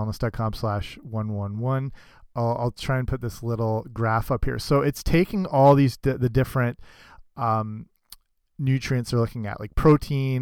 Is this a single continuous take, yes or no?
yes